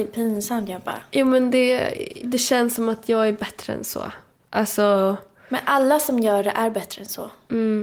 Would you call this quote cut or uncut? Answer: cut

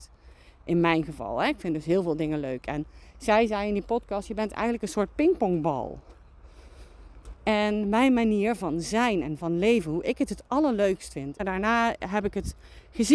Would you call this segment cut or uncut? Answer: cut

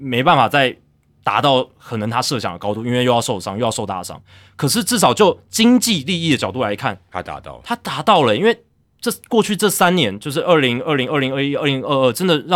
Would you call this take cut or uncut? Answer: uncut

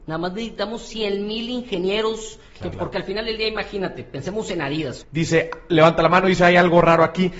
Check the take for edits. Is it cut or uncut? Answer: cut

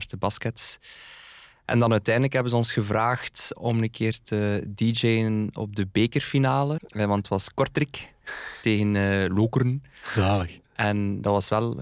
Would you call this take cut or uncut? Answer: cut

